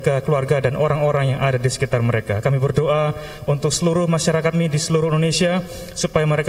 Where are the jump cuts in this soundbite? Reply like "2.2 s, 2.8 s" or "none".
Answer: 2.4 s, 4.5 s